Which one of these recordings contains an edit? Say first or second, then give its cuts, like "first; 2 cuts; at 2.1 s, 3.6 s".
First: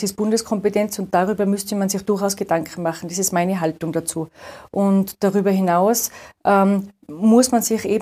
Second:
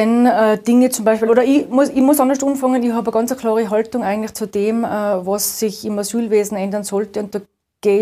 second; 1 cut; at 1.3 s